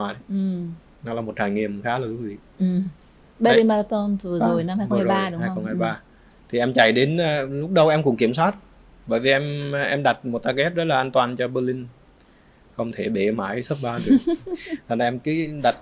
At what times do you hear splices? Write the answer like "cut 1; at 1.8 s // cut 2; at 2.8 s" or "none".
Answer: cut 1; at 3.2 s